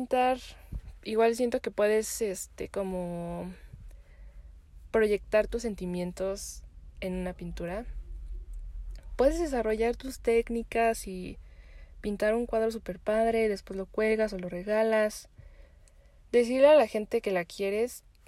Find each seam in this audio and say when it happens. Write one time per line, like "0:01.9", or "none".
none